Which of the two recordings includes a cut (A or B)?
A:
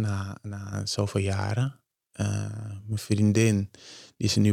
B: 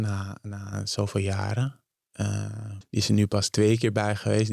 B